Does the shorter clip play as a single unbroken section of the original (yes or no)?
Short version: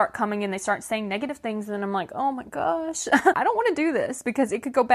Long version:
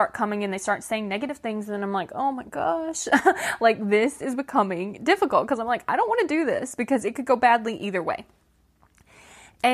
no